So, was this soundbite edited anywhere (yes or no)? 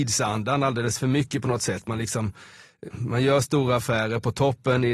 yes